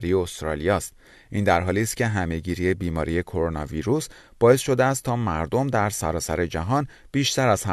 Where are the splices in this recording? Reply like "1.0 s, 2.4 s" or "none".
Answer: 1.1 s